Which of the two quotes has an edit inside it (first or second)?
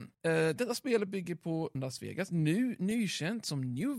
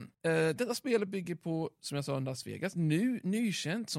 first